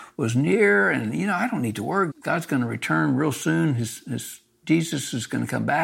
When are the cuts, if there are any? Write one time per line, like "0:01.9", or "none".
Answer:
0:02.1